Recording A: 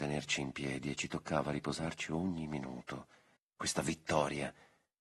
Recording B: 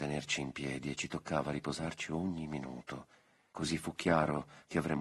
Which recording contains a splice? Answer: A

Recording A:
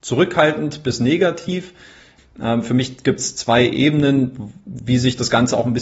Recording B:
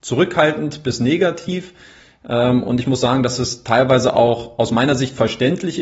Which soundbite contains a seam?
A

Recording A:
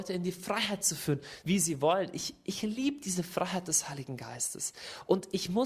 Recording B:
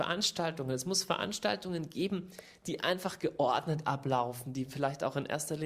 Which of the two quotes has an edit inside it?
A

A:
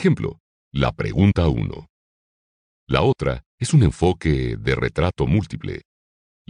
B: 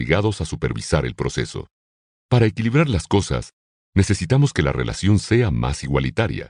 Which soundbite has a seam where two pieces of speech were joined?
B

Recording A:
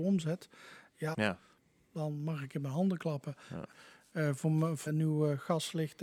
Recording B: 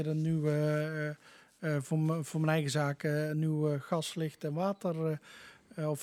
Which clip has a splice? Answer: A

